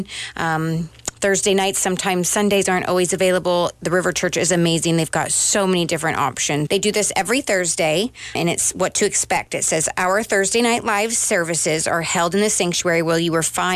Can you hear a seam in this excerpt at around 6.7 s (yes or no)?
yes